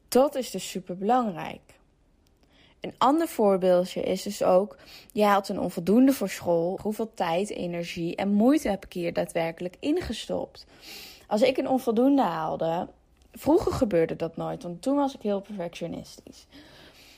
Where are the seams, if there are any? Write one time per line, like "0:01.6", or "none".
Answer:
0:06.8